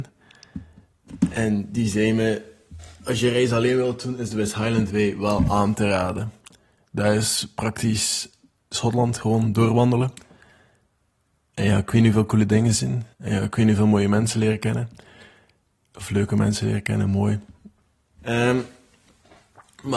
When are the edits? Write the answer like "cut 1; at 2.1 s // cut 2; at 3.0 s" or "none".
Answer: cut 1; at 13.1 s // cut 2; at 18.2 s